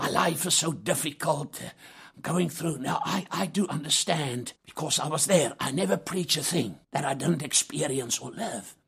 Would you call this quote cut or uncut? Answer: cut